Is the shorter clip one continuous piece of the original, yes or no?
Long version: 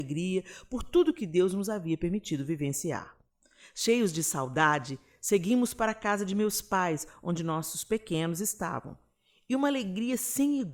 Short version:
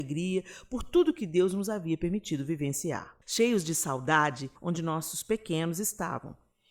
no